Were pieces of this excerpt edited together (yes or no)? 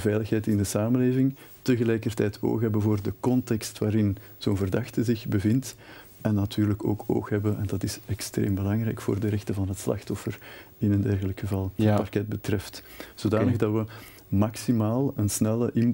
yes